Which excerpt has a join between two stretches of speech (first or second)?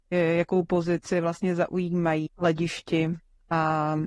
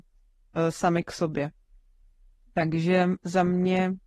first